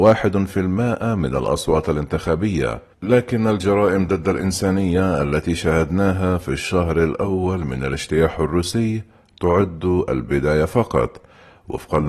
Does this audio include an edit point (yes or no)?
yes